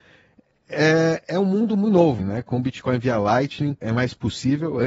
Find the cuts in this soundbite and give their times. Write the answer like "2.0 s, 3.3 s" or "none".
2.2 s, 3.8 s